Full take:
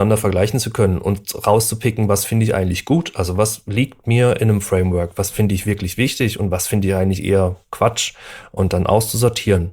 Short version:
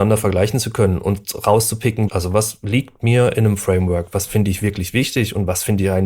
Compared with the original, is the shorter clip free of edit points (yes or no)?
no